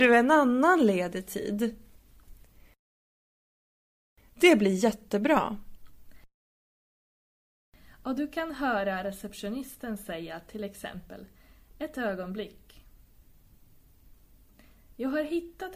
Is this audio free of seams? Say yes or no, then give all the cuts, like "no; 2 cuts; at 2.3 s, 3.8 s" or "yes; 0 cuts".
yes; 0 cuts